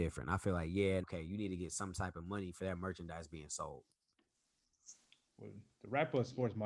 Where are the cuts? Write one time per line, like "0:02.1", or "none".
0:01.0